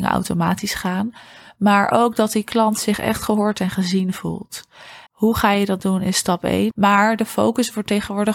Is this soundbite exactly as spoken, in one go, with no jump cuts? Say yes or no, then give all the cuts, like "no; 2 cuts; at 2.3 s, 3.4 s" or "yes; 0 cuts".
no; 2 cuts; at 5.1 s, 6.7 s